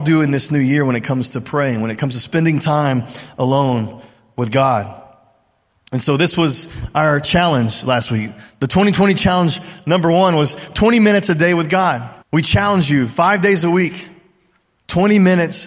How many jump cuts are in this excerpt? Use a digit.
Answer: 1